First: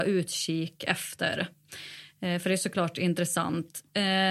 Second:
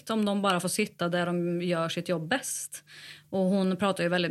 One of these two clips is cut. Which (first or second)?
second